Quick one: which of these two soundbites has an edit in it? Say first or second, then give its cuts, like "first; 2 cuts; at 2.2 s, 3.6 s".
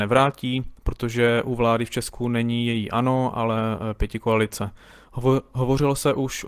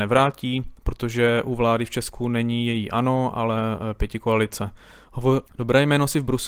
second; 1 cut; at 5.4 s